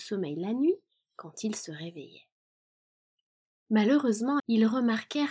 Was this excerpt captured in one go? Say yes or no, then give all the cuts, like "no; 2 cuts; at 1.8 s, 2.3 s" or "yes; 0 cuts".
no; 1 cut; at 4.4 s